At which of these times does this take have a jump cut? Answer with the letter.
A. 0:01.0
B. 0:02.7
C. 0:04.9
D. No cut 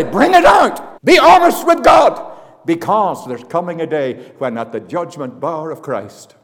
A